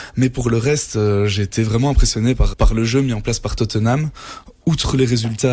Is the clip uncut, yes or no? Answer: no